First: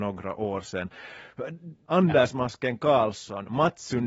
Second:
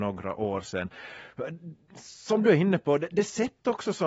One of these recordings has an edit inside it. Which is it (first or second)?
first